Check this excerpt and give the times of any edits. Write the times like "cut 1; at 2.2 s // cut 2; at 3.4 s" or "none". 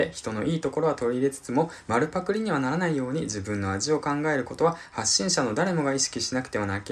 none